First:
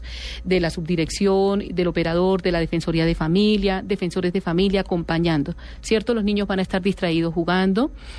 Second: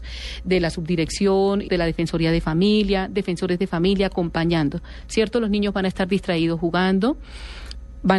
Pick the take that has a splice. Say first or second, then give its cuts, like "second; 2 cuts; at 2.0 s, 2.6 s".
second; 1 cut; at 1.7 s